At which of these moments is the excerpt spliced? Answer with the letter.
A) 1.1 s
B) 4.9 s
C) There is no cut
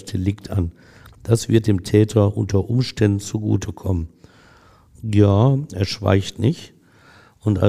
B